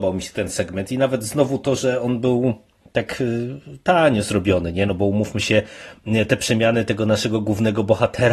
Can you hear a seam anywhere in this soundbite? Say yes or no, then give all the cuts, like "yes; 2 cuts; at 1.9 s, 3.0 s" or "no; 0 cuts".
no; 0 cuts